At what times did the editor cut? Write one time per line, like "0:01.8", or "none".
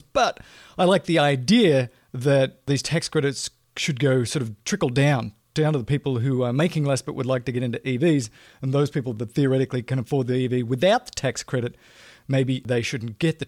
none